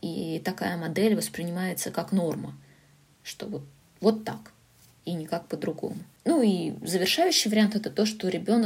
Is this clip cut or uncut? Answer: uncut